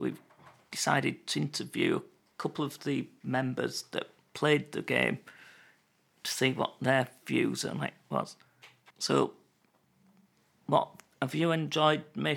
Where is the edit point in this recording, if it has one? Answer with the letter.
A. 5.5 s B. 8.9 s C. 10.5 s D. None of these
B